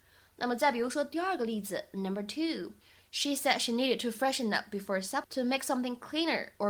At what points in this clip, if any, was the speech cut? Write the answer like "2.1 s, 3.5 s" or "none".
5.2 s